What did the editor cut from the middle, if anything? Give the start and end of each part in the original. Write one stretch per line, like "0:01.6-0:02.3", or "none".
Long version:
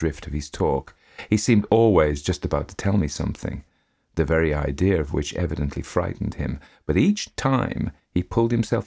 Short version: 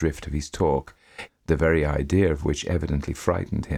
0:01.3-0:03.9